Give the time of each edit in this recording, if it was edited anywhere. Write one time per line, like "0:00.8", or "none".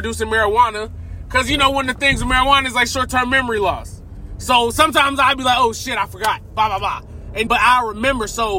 0:07.5